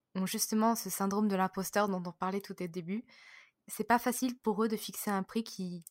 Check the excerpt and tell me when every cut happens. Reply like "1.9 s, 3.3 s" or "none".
3.6 s